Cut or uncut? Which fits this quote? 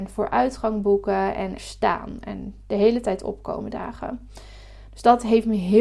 cut